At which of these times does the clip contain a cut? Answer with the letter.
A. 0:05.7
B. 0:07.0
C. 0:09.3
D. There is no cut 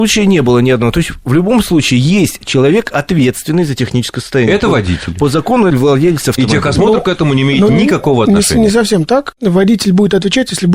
A